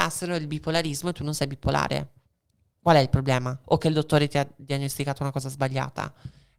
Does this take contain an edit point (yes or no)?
yes